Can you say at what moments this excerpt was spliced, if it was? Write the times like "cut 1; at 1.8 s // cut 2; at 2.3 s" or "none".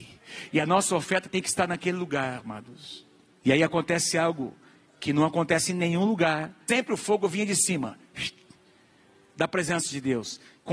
cut 1; at 6.7 s